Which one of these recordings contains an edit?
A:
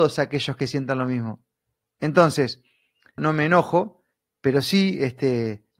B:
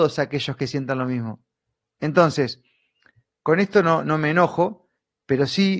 A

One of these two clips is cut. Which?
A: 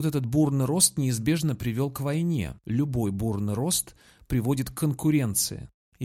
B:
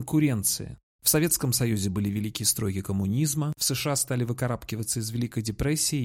B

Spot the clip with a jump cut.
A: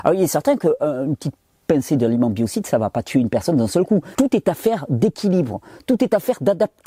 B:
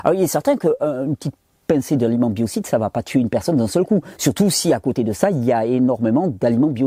A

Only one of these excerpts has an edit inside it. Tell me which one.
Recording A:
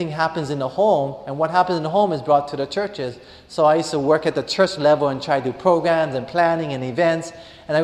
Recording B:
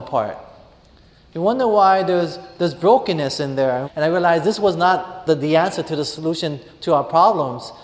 B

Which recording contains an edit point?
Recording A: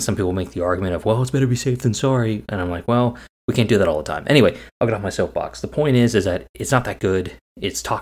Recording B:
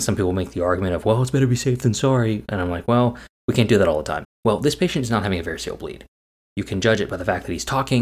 B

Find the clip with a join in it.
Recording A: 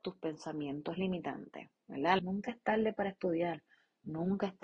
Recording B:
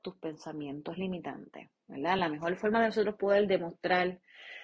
A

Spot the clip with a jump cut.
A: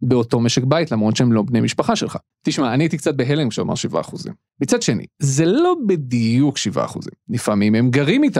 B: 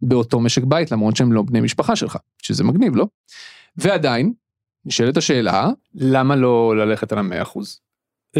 A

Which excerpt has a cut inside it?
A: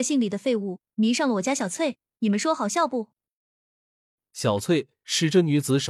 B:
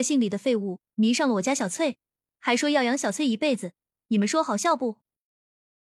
A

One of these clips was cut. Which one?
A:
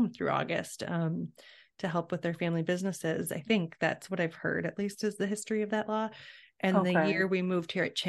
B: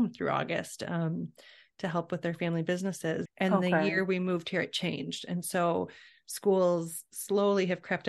B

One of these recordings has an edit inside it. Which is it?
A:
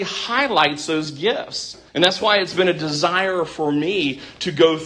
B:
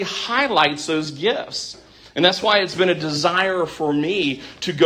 A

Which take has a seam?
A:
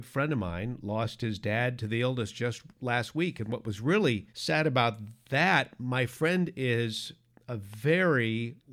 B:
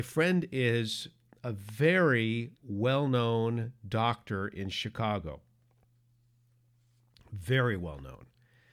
A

